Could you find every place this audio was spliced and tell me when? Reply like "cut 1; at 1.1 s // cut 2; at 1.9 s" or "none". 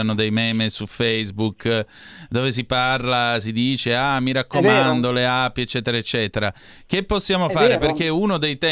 none